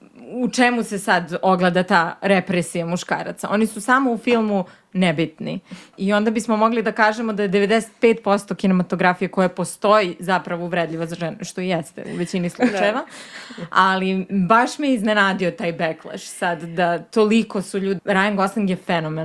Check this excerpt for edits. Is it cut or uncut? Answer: cut